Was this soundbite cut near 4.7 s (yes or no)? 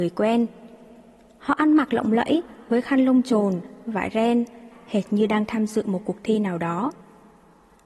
yes